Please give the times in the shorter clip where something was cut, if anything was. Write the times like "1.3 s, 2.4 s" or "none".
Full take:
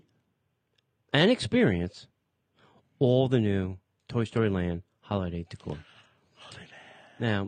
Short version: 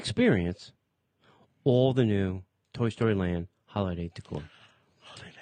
none